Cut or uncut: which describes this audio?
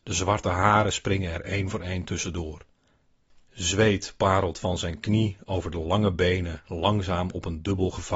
uncut